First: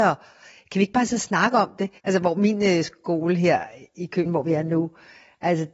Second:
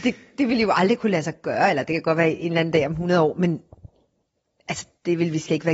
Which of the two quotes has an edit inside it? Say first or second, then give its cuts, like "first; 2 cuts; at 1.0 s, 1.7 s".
first; 2 cuts; at 2.0 s, 4.3 s